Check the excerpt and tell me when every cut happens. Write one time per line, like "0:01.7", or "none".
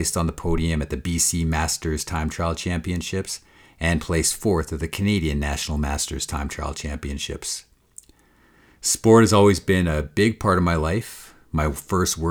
none